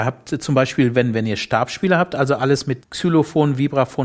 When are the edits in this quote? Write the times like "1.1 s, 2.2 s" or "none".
2.8 s

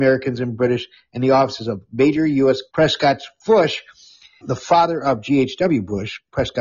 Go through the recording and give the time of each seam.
2.7 s, 4.4 s

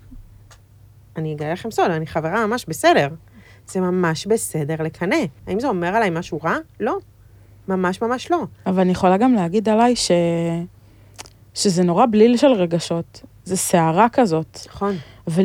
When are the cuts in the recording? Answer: 5.4 s

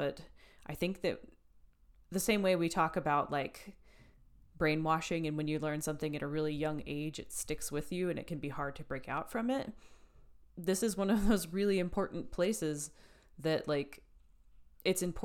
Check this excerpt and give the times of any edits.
none

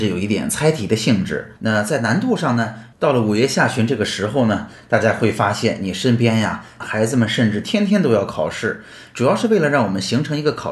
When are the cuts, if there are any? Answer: 1.6 s, 2.9 s, 6.8 s

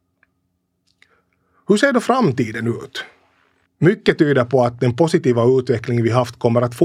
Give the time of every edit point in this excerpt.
3.7 s

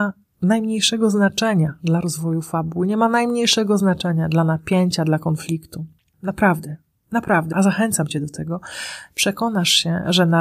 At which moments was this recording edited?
6.1 s, 7.5 s

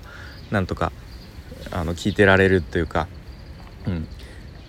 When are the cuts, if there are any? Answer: 2.0 s

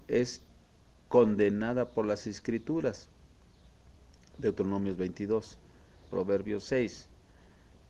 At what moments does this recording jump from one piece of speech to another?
6.0 s

